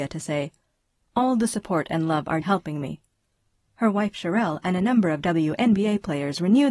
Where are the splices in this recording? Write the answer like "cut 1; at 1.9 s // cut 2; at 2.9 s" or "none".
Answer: cut 1; at 2.4 s